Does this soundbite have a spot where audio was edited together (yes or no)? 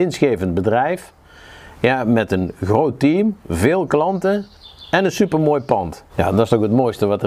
yes